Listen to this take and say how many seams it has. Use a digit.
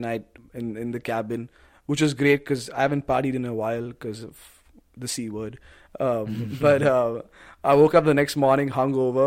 0